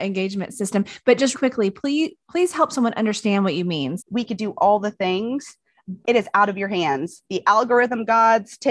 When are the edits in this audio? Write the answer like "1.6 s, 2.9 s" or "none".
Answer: 1.3 s, 4.0 s, 6.0 s